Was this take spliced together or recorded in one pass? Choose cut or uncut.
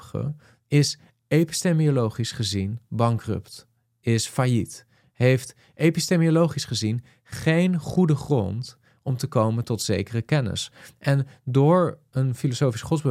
uncut